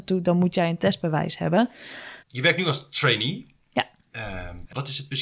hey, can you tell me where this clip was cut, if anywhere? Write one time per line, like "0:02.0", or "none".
0:02.2